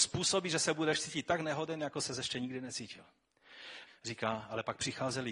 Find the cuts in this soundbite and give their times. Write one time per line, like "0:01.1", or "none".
0:03.9